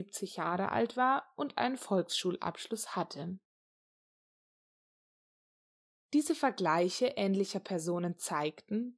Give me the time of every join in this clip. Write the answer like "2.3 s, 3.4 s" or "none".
none